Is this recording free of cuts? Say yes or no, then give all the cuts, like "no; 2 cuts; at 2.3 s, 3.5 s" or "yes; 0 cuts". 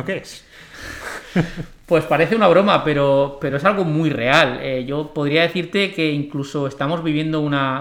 yes; 0 cuts